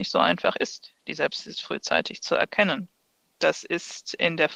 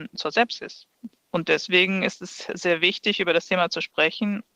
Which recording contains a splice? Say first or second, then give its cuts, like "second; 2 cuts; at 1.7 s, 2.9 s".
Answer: second; 1 cut; at 1.2 s